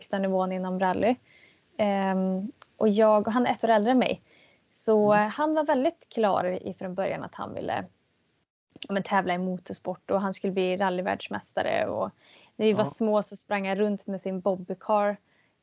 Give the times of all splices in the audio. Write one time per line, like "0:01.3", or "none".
none